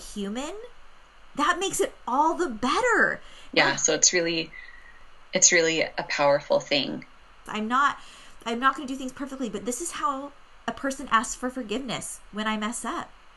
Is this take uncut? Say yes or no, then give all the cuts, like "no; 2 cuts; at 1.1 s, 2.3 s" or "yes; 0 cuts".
no; 2 cuts; at 3.5 s, 7.5 s